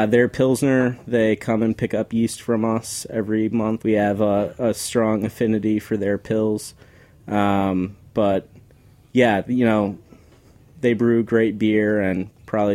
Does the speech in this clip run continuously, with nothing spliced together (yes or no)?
no